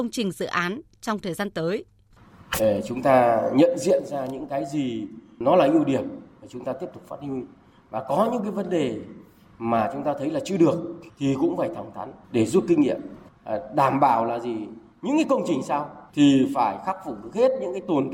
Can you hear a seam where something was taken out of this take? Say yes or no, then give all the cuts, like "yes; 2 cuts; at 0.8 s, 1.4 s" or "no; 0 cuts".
yes; 2 cuts; at 12.2 s, 16.1 s